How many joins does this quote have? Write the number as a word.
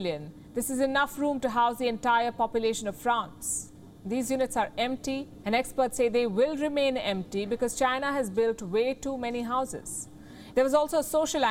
two